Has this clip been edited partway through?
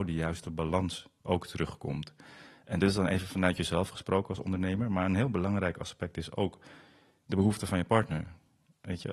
no; 0 cuts

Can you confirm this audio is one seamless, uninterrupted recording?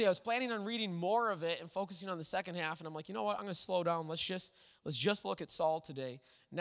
yes; 0 cuts

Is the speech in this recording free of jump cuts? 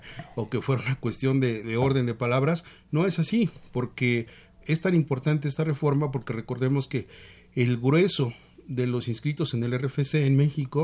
no; 1 cut; at 1.6 s

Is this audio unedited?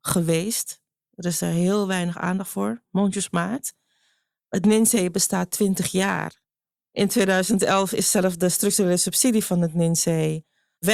yes; 0 cuts

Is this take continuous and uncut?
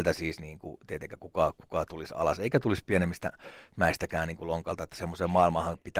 yes; 0 cuts

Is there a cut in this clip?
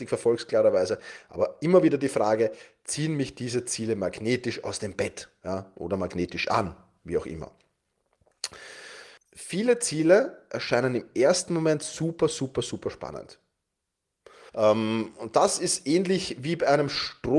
yes; 2 cuts; at 9.2 s, 14.5 s

